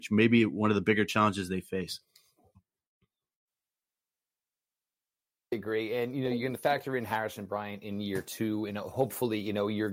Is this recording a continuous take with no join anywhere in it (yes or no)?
yes